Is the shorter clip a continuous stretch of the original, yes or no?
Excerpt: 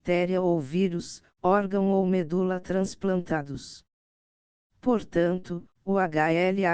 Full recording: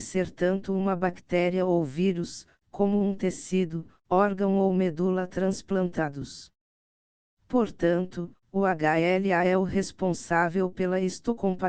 no